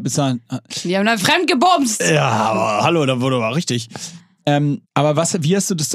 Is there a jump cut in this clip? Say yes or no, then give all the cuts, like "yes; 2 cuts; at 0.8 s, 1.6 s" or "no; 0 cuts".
yes; 1 cut; at 4.8 s